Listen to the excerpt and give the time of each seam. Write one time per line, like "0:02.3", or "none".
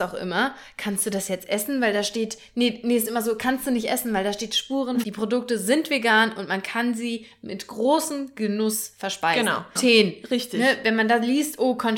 0:05.0
0:09.8